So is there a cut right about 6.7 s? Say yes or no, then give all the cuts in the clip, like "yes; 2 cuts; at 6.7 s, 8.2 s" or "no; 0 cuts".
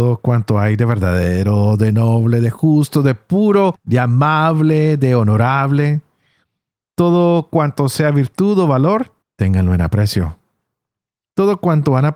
no; 0 cuts